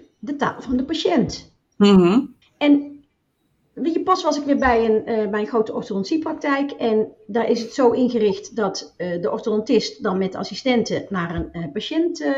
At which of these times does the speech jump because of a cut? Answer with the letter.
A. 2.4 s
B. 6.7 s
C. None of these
A